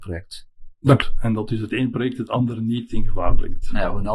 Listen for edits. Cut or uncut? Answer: cut